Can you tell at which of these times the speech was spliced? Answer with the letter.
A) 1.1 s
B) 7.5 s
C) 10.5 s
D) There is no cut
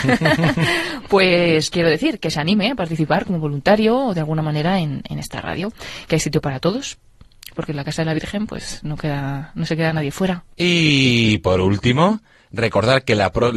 D